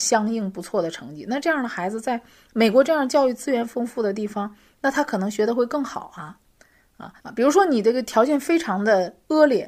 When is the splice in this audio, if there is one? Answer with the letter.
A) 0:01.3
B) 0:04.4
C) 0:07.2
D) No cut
C